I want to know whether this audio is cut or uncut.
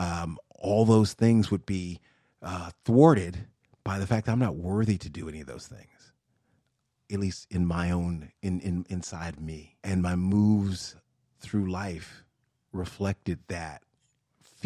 cut